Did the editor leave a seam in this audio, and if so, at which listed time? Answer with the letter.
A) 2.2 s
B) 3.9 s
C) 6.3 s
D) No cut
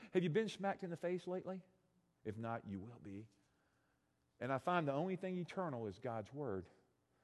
A